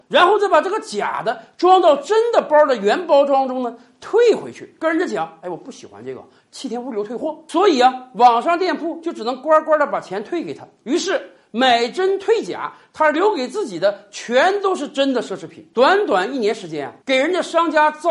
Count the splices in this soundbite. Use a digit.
1